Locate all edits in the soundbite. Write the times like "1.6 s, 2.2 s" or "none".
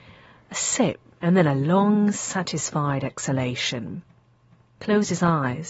none